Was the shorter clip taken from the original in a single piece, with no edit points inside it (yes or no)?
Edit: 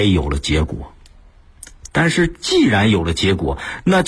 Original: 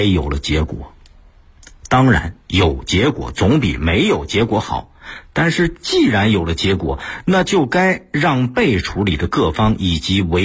no